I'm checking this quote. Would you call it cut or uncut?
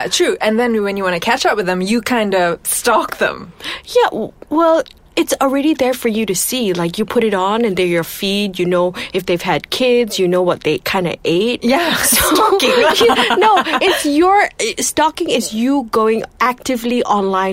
uncut